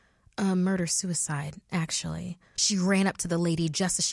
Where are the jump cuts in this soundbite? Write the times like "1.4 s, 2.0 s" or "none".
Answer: 2.6 s